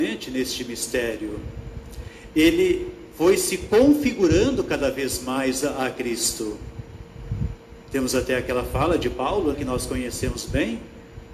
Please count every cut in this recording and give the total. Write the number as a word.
one